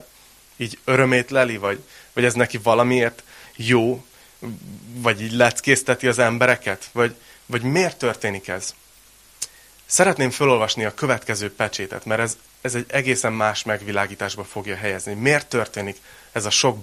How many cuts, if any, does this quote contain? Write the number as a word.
zero